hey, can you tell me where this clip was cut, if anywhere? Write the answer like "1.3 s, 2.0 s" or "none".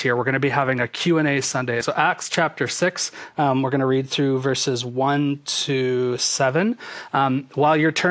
1.8 s